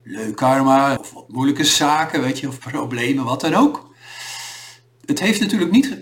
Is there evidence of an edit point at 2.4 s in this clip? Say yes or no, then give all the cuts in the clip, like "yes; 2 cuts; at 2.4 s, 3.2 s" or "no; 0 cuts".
no; 1 cut; at 1.0 s